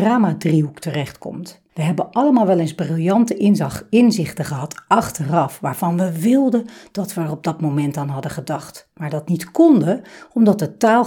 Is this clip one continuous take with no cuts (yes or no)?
no